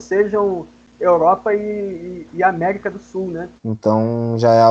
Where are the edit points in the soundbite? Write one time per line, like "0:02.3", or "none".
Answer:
0:03.6